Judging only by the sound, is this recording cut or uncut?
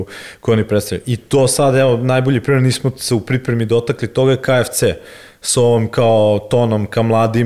cut